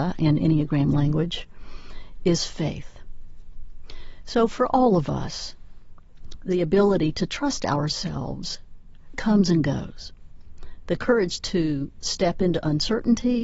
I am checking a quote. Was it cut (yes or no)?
yes